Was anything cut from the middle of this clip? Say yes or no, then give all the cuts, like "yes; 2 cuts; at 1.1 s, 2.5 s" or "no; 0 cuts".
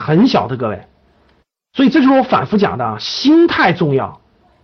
no; 0 cuts